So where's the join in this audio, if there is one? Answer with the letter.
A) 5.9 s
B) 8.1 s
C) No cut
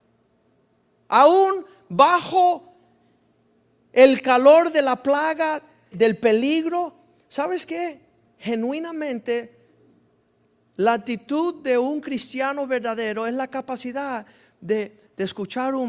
A